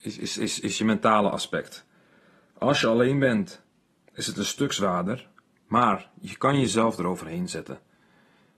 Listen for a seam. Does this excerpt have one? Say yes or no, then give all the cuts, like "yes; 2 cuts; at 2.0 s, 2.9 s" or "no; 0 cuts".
no; 0 cuts